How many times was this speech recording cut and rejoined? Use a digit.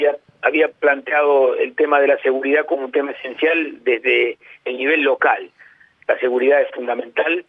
1